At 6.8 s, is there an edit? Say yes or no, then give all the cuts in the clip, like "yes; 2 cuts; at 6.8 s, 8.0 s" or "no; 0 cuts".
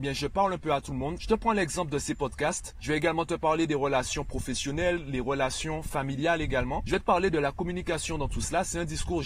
no; 2 cuts; at 1.2 s, 2.7 s